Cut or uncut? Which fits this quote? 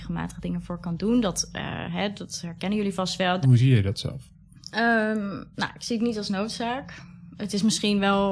cut